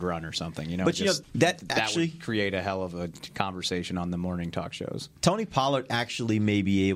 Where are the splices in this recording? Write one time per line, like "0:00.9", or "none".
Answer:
0:01.2